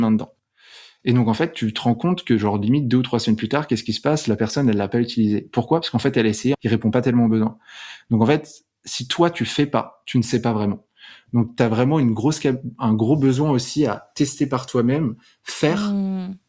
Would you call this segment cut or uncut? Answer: cut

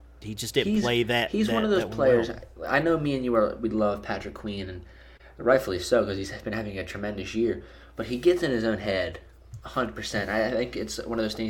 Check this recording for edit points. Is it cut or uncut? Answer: uncut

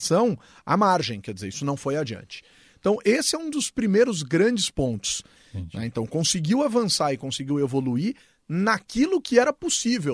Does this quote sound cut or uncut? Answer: cut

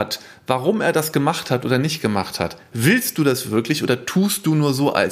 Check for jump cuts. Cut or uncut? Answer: uncut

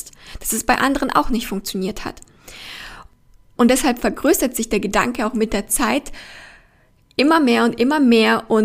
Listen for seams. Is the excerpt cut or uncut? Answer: cut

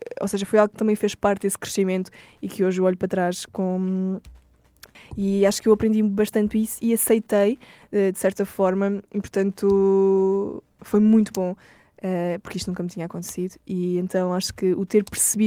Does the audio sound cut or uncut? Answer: cut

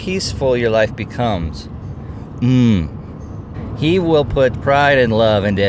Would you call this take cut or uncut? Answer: cut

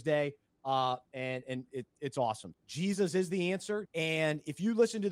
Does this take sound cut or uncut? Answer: cut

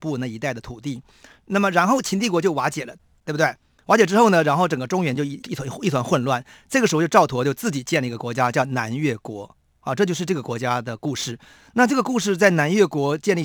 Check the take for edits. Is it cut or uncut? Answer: uncut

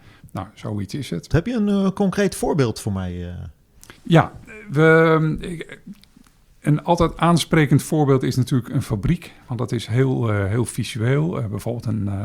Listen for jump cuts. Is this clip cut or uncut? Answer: cut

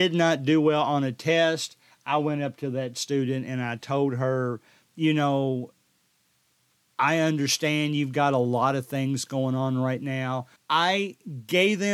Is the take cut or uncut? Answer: cut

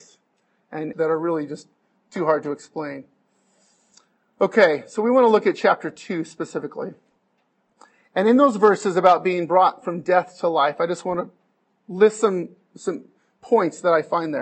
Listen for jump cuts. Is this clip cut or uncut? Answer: cut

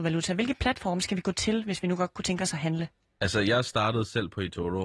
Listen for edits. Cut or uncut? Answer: uncut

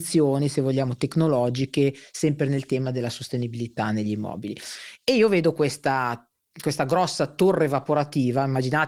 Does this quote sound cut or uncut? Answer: uncut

